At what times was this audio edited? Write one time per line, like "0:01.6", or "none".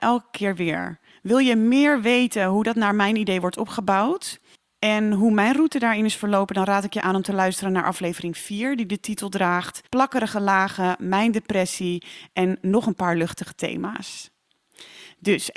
0:01.1
0:09.9

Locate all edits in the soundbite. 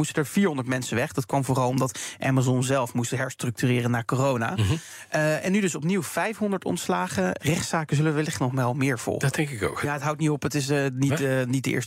0:07.4
0:09.8

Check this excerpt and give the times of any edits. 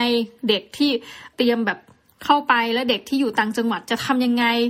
0:01.3

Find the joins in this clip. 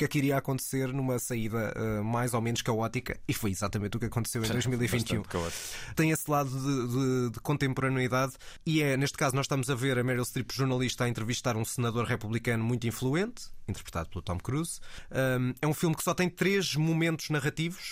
none

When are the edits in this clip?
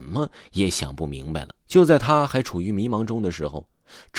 0:01.6

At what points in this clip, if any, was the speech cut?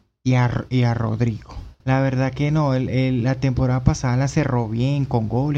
0:01.8

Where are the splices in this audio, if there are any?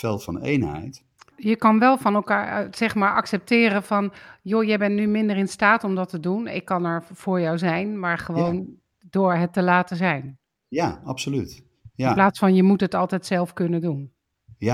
0:01.3

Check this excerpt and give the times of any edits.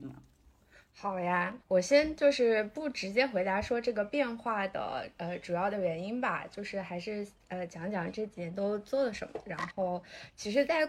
0:01.6

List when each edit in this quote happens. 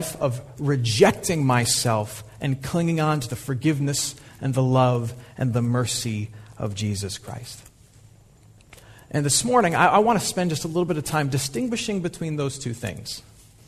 none

